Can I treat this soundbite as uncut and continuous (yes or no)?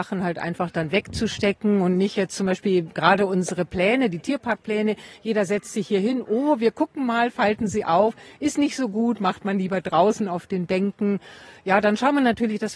yes